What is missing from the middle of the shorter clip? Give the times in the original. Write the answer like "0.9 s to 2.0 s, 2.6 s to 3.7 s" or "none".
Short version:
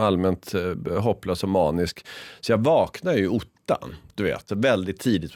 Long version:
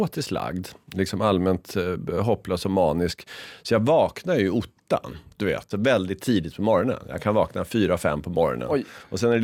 none